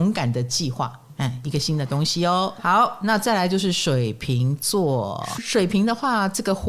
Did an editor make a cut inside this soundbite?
yes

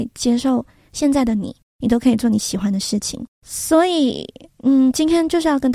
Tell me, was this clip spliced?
yes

